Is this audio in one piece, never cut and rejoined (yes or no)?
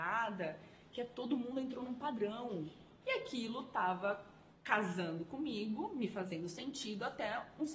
no